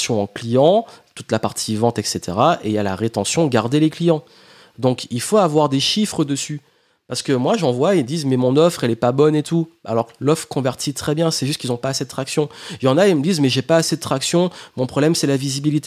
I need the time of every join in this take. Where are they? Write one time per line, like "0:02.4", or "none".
none